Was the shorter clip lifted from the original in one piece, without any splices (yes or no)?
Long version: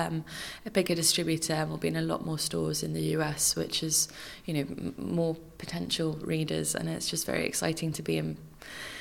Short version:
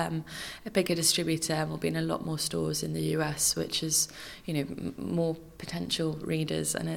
yes